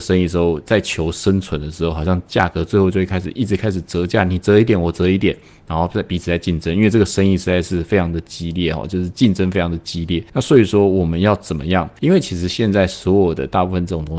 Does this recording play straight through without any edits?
no; 1 cut; at 12.0 s

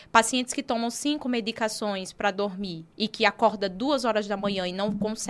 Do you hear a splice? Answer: yes; 1 cut; at 2.9 s

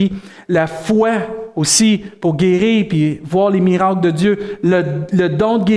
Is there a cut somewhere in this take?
no; 0 cuts

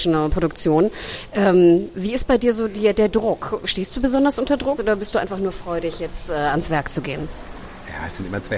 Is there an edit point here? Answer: yes; 1 cut; at 4.8 s

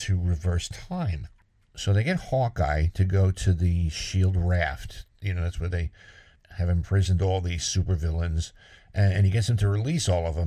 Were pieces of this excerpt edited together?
no; 0 cuts

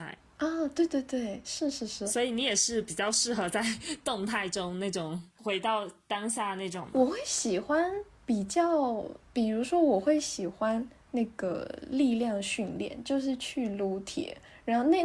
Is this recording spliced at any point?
no; 0 cuts

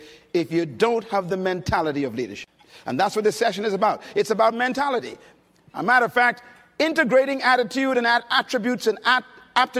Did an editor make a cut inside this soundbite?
no; 0 cuts

